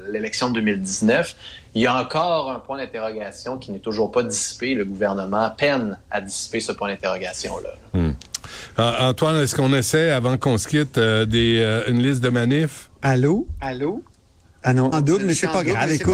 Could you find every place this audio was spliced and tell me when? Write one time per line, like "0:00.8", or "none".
0:13.0
0:14.9